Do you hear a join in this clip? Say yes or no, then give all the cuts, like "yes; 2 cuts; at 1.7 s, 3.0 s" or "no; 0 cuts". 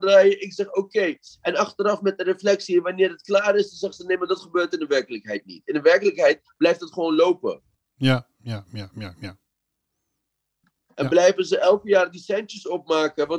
no; 0 cuts